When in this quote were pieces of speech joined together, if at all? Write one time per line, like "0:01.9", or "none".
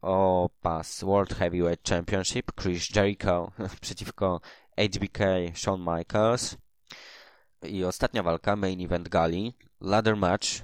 0:02.9
0:07.5